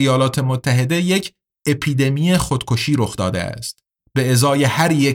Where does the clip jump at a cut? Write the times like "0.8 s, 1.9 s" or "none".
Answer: 4.0 s